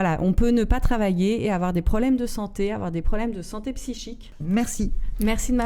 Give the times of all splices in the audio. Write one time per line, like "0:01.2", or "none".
0:04.4